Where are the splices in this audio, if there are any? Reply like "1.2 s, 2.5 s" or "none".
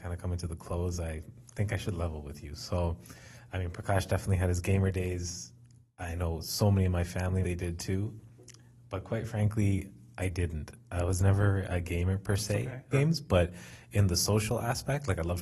7.4 s, 12.9 s